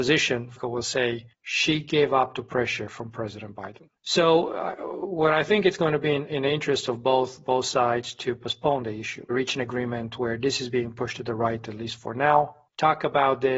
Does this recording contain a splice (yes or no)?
no